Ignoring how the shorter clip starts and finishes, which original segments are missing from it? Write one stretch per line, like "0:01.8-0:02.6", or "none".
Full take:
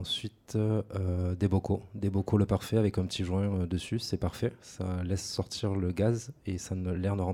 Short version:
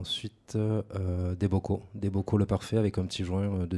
none